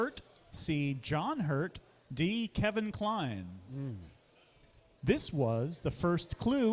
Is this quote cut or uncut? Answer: uncut